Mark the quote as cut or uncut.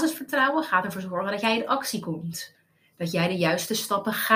uncut